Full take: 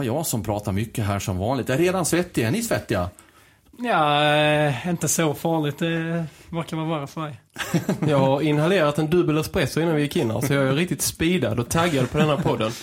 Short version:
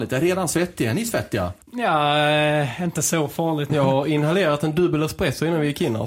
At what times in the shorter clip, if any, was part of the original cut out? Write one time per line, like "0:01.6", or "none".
0:01.6
0:03.7